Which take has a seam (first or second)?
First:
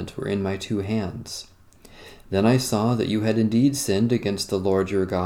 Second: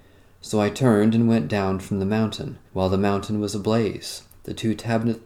second